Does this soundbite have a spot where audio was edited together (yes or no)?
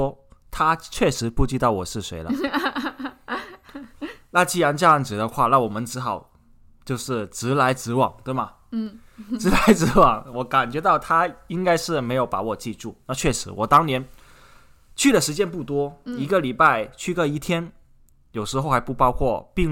no